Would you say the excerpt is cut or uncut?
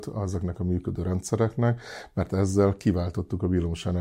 uncut